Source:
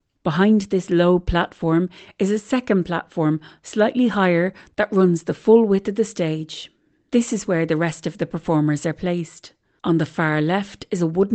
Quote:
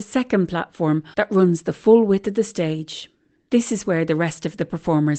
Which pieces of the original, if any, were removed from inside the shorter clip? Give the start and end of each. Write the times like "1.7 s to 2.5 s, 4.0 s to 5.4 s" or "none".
3.5 s to 4.7 s